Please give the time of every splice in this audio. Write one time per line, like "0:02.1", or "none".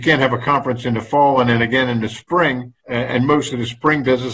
0:02.8